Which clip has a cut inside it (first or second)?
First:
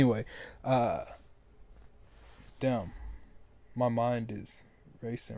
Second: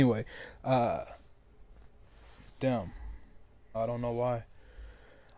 second